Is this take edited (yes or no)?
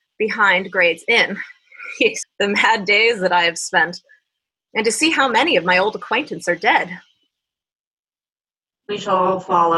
yes